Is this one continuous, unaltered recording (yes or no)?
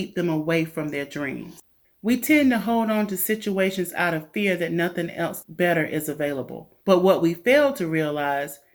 no